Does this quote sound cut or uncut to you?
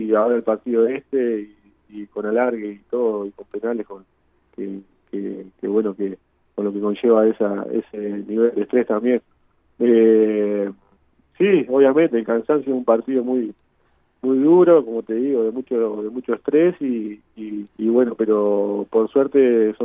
cut